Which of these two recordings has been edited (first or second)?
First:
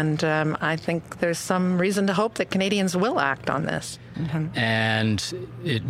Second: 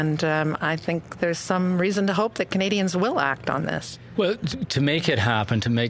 first